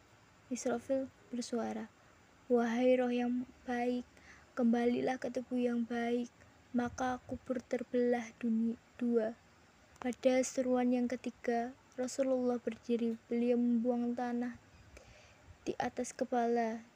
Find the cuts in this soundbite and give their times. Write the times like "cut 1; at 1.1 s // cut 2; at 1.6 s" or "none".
cut 1; at 9.9 s